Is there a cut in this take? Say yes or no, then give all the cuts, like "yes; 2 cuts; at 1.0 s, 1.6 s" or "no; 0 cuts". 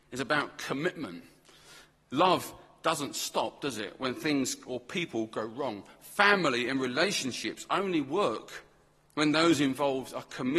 no; 0 cuts